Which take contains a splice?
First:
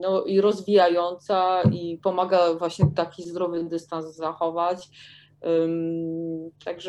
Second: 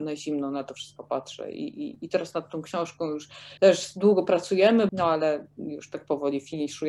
second; 2 cuts; at 3.6 s, 4.9 s

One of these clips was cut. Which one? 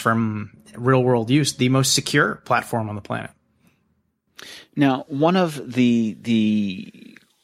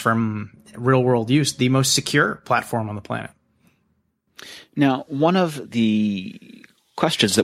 second; 1 cut; at 5.6 s

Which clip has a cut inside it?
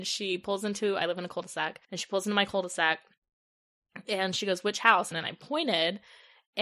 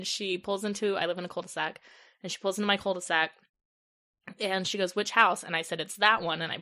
first; 2 cuts; at 1.8 s, 5.1 s

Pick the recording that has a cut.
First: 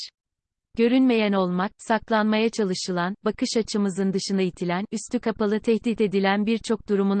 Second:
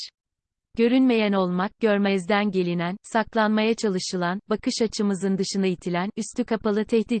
first; 1 cut; at 1.8 s

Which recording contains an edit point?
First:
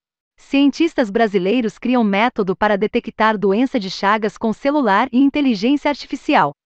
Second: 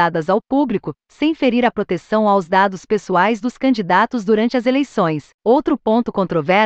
second; 1 cut; at 5.3 s

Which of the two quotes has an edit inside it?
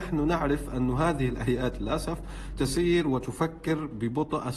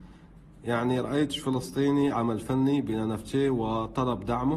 second; 1 cut; at 2.1 s

